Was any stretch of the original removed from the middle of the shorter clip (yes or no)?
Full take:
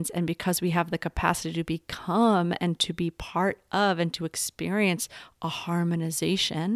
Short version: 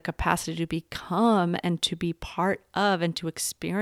no